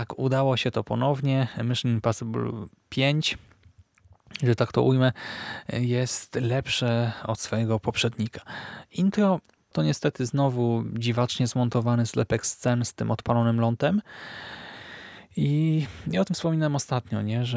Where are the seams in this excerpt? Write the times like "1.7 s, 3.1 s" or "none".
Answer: none